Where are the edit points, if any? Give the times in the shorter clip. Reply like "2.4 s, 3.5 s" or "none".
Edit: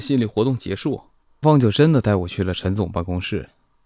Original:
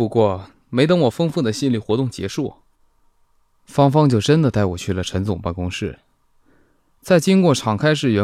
1.4 s